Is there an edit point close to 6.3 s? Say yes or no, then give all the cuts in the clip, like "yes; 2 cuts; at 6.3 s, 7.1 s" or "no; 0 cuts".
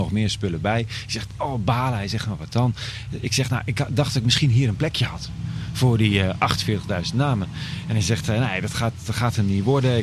no; 0 cuts